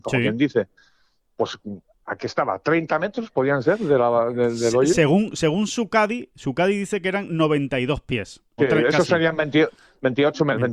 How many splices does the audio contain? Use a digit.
1